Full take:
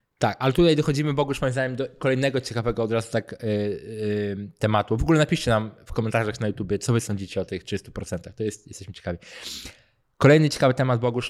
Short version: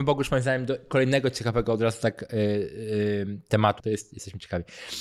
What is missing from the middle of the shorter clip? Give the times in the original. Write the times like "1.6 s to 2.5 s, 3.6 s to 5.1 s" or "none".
4.9 s to 8.3 s